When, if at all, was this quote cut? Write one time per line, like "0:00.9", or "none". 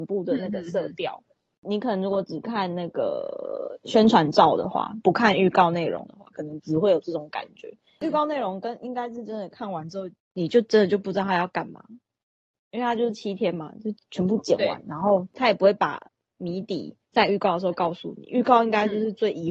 0:17.0